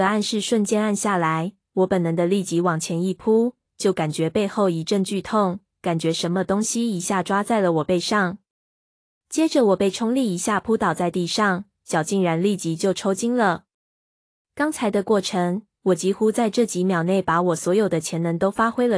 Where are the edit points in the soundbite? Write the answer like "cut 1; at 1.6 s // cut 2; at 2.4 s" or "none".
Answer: cut 1; at 3.6 s

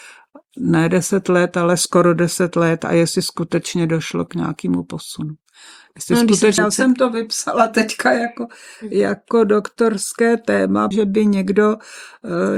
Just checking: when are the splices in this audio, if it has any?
cut 1; at 6.6 s // cut 2; at 10.9 s

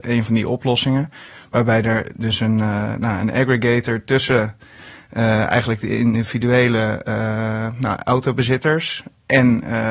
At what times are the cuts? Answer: none

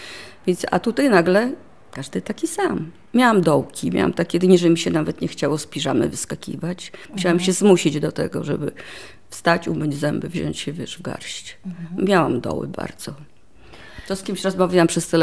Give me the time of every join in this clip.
none

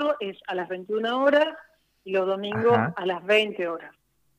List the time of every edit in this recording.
none

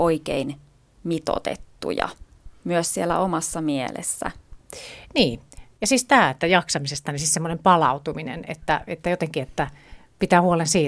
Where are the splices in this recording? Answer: none

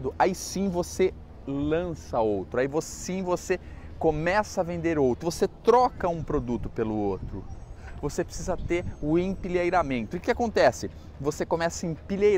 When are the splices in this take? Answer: cut 1; at 5.2 s // cut 2; at 10.1 s

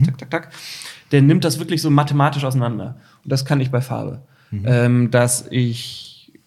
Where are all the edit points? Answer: none

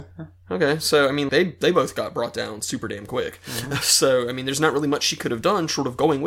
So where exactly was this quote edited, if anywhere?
cut 1; at 1.3 s

